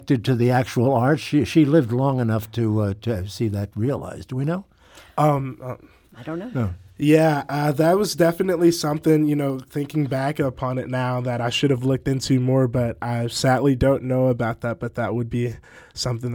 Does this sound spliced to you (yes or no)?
no